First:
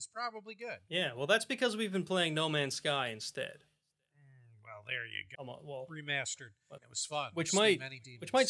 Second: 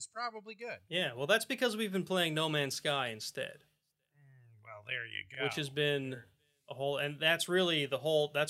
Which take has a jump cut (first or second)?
first